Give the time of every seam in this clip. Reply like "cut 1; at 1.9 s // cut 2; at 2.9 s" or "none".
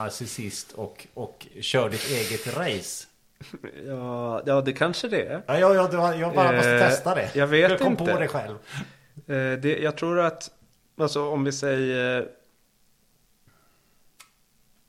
none

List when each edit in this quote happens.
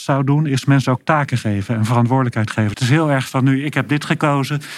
cut 1; at 2.7 s

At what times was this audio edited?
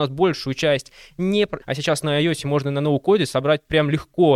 cut 1; at 1.6 s

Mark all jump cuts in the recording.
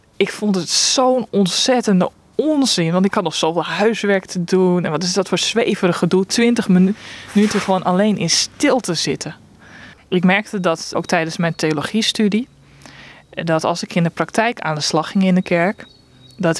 cut 1; at 9.9 s // cut 2; at 10.9 s

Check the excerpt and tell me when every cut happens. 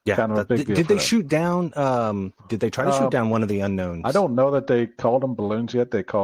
cut 1; at 2.4 s

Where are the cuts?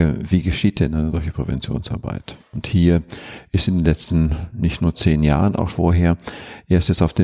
cut 1; at 5.7 s

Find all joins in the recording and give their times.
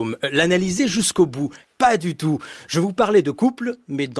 cut 1; at 1.7 s

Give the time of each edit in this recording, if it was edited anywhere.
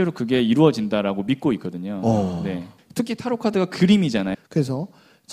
cut 1; at 2.8 s // cut 2; at 4.3 s

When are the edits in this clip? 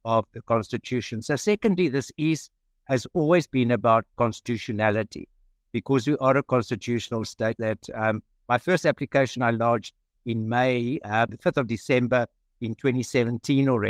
cut 1; at 7.6 s // cut 2; at 11.3 s

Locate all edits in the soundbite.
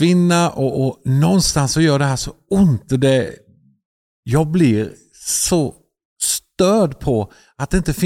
none

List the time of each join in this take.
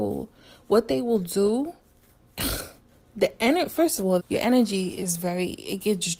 cut 1; at 4.2 s

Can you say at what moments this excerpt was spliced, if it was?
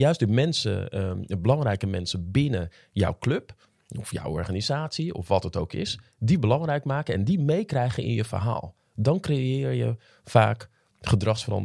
none

